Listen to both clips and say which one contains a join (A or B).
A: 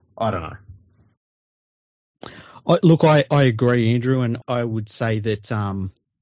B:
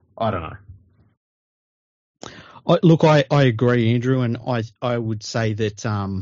A